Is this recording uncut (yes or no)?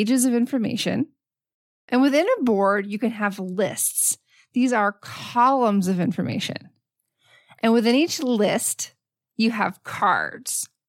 yes